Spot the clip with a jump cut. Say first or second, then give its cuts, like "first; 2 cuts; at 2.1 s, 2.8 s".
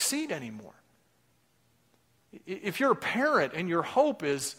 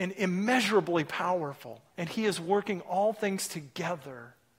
second; 1 cut; at 1.9 s